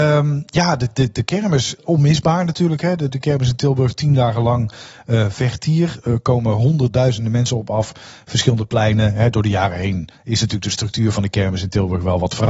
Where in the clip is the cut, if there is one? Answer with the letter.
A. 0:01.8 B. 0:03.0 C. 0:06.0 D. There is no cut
A